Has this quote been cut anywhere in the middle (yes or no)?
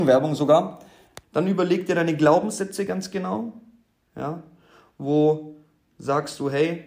yes